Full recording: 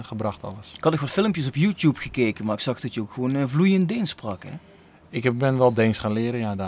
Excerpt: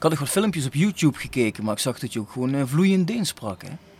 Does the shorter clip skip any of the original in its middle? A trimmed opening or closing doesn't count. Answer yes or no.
no